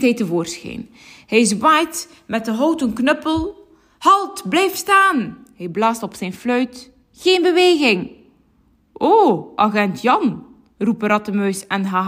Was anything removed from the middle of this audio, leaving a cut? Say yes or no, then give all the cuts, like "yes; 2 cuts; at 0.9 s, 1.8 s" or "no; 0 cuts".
no; 0 cuts